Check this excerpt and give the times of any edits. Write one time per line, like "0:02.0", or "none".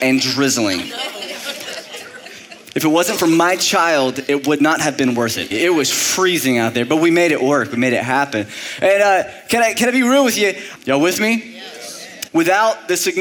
0:05.5
0:10.8
0:12.3